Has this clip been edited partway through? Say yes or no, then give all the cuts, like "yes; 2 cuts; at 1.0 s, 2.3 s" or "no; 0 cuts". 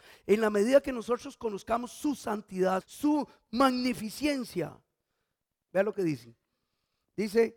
yes; 2 cuts; at 2.8 s, 5.7 s